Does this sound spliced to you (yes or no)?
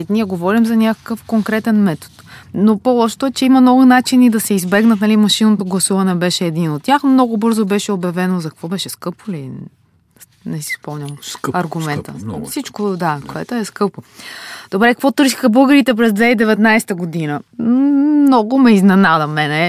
yes